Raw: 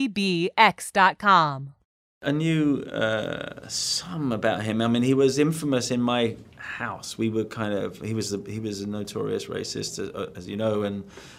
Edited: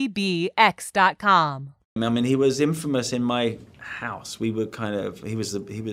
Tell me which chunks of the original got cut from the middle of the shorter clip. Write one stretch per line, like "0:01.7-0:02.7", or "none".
0:02.0-0:04.7